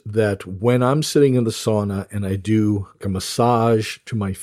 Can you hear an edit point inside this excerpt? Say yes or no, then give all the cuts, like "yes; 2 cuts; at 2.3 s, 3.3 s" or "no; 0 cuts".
yes; 1 cut; at 3.0 s